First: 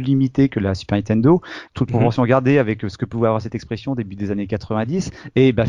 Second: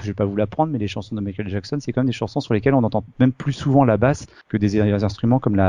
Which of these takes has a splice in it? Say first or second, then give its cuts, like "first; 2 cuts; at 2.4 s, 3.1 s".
first; 1 cut; at 1.7 s